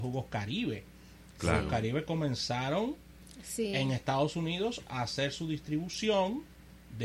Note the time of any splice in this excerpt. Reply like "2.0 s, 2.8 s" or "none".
none